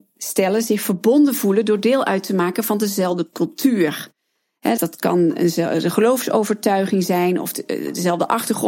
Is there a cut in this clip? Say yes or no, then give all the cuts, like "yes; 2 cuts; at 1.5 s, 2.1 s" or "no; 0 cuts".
yes; 1 cut; at 4.8 s